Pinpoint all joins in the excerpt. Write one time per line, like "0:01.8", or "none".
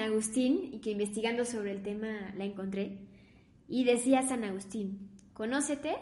none

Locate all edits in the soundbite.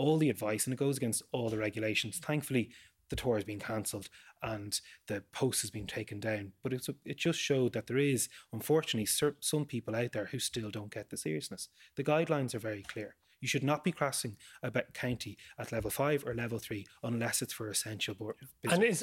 none

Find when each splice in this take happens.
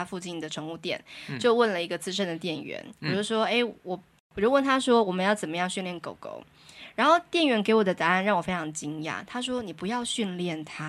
none

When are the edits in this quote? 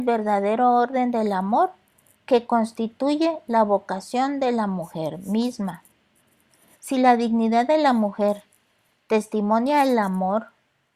0:06.7

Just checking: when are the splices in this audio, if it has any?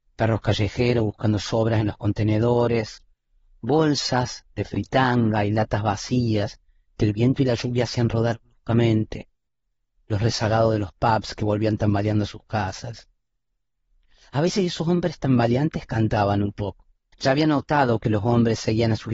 0:17.1

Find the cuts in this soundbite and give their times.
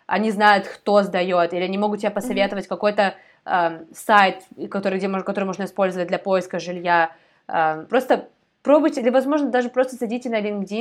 0:07.9
0:09.0

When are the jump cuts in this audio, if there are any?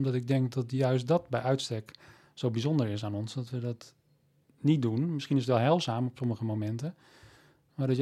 none

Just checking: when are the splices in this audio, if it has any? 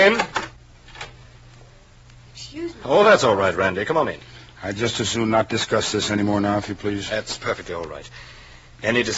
none

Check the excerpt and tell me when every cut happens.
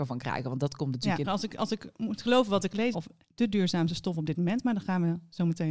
0:01.2
0:02.9

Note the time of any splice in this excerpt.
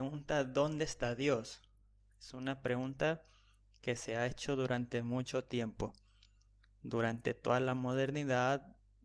none

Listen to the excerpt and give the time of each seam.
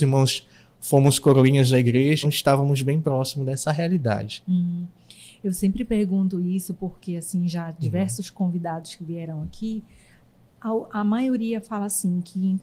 0:02.2

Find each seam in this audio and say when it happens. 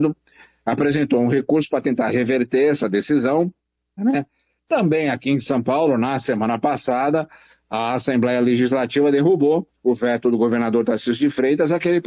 0:04.0

